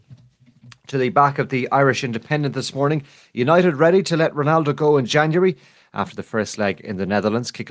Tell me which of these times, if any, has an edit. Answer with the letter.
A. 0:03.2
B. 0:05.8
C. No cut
B